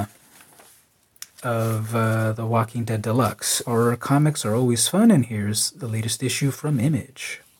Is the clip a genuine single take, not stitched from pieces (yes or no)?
no